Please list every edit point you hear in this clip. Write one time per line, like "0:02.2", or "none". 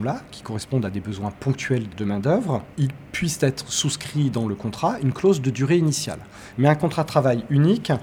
0:02.7
0:06.5